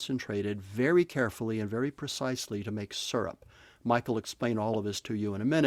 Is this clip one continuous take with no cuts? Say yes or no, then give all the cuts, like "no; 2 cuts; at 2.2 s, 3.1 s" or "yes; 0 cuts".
yes; 0 cuts